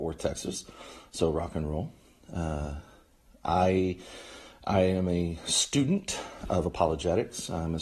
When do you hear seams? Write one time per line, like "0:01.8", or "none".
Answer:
none